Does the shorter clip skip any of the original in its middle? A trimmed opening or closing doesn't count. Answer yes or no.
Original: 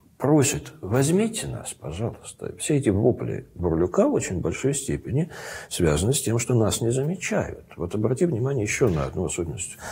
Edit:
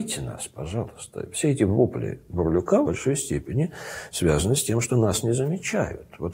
yes